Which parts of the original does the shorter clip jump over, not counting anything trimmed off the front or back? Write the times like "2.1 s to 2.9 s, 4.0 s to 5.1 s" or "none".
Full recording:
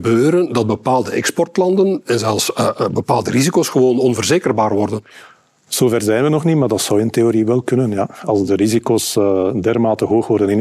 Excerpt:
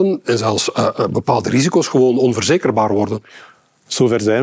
none